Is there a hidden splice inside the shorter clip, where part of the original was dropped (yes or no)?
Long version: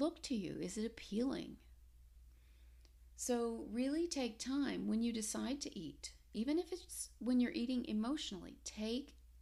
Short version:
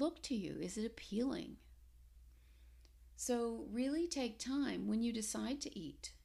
no